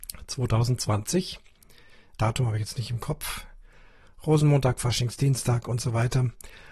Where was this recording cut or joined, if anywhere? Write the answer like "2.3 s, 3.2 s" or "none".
2.2 s